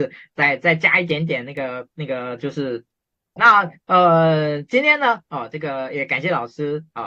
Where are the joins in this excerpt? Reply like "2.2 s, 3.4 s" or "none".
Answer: 3.4 s